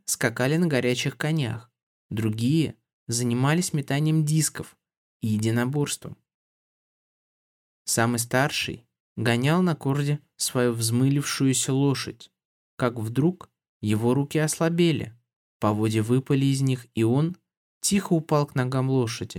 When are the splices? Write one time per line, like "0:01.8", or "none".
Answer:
0:09.0